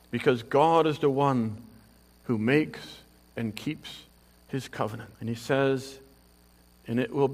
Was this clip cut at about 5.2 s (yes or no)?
yes